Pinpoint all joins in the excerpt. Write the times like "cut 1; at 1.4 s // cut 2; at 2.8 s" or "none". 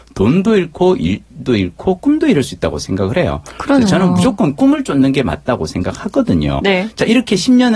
cut 1; at 6.6 s